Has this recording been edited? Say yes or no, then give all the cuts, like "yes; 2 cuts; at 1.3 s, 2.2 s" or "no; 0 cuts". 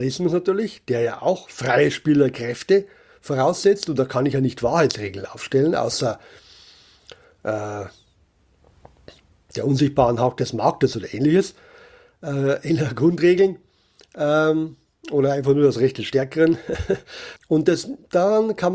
yes; 1 cut; at 17.4 s